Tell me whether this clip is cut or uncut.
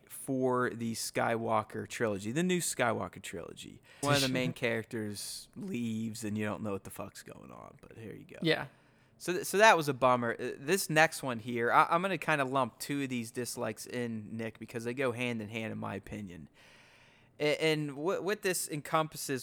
cut